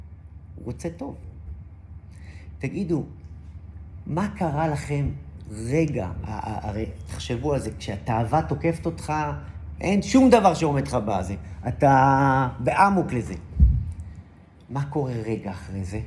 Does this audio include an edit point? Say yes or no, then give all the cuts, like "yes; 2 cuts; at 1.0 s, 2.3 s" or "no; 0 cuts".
yes; 1 cut; at 9.8 s